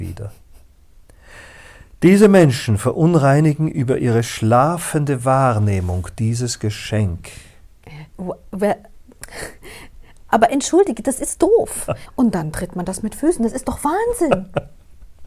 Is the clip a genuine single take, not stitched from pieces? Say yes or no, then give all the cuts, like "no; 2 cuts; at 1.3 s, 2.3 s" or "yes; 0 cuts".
no; 2 cuts; at 8.1 s, 12.1 s